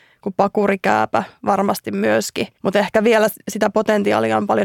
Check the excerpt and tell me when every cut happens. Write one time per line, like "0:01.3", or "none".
0:02.5

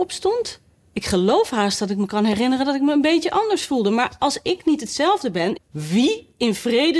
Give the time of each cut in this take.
0:05.6

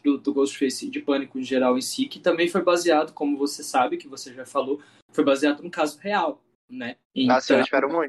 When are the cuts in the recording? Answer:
0:07.0

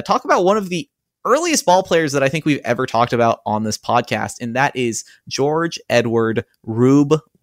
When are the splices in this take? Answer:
none

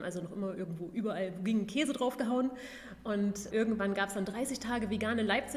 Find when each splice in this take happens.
0:03.5

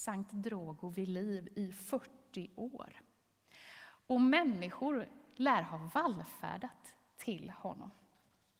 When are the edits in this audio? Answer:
none

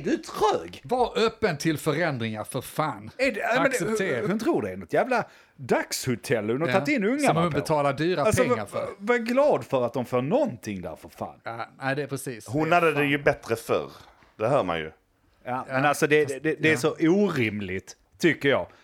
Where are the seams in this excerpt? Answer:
0:04.2

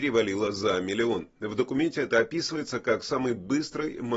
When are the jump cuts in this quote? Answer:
none

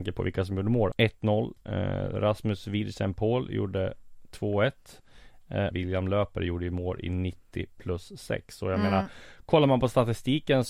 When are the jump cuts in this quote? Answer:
0:00.9
0:05.7

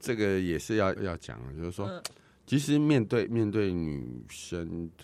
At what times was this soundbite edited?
0:01.0

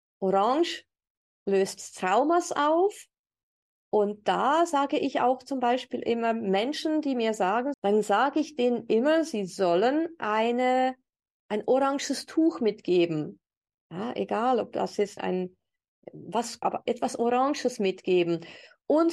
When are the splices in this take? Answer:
0:07.7
0:15.2
0:16.6

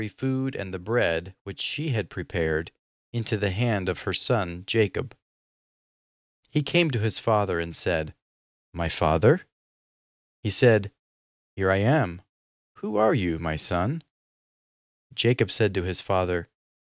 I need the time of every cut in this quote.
none

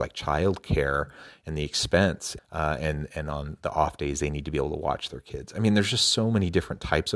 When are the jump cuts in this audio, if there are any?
0:02.4

